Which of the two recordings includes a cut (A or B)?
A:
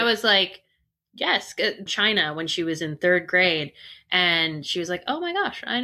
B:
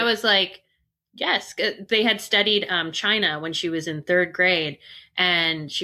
A